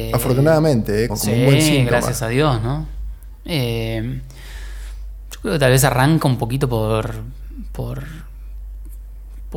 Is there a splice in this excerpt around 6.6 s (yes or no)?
no